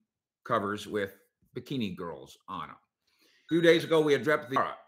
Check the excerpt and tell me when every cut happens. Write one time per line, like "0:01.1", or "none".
0:03.5